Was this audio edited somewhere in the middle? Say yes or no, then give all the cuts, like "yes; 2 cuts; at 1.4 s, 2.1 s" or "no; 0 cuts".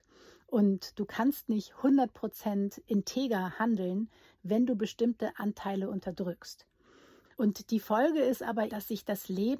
yes; 2 cuts; at 7.3 s, 8.7 s